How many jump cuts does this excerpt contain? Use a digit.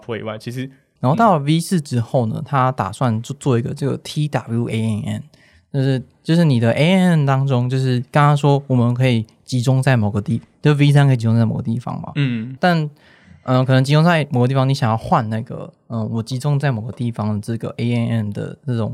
2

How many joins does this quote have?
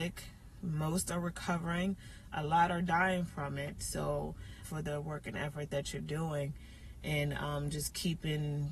1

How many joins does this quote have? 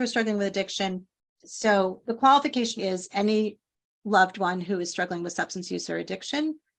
2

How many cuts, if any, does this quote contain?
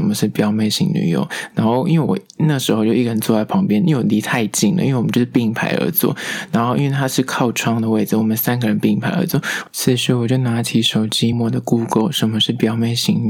1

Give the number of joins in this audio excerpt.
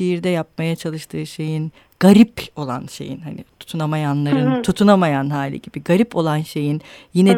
0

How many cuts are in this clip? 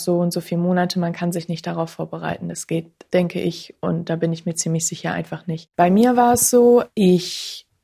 1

